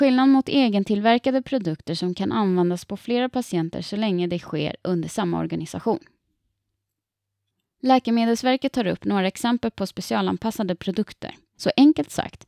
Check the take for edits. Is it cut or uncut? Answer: cut